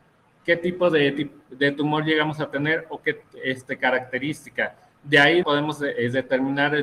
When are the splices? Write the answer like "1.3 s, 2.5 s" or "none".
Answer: 5.4 s